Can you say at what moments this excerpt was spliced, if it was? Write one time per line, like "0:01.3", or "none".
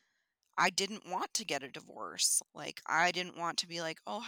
0:02.4